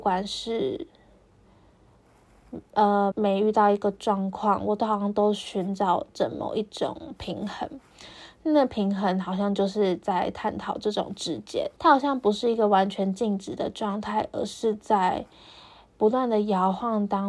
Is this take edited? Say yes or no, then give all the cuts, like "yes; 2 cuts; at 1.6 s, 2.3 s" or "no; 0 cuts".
yes; 2 cuts; at 3.1 s, 11.8 s